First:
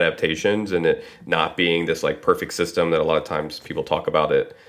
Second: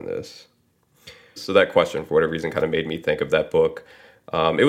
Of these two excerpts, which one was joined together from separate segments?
second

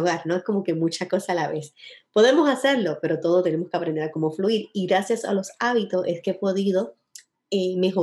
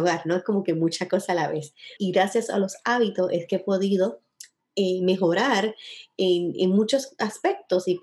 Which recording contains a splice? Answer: second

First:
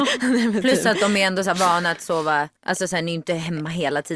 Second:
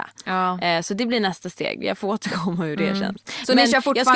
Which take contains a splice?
first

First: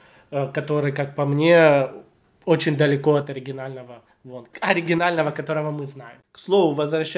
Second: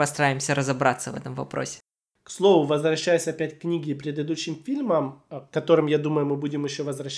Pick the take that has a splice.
first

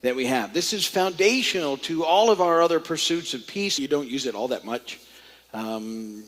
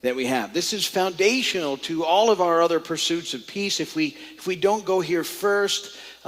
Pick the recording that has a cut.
first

